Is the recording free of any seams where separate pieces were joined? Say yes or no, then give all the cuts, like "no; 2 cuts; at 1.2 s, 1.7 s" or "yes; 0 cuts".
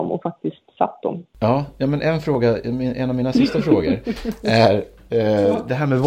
yes; 0 cuts